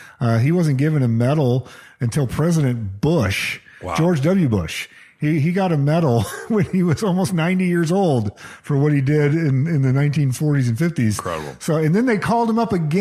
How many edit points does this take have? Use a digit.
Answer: 0